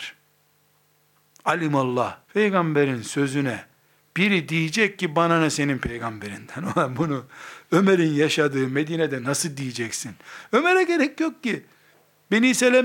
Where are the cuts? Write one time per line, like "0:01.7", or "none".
0:02.2